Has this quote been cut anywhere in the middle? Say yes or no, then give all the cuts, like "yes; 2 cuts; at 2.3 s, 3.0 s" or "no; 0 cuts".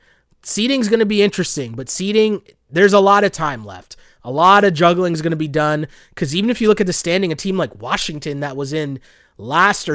no; 0 cuts